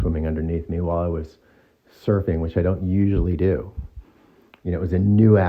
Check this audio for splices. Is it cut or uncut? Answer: uncut